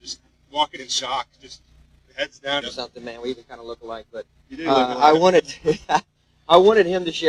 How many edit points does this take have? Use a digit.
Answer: 1